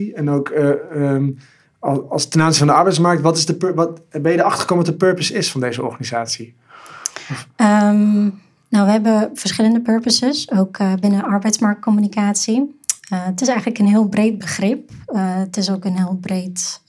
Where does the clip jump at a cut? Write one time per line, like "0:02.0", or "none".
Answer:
none